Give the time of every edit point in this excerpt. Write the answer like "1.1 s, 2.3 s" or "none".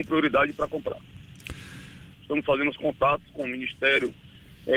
2.1 s